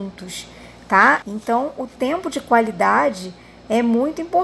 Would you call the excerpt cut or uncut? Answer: cut